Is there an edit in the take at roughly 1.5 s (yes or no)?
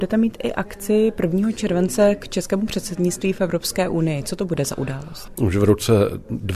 no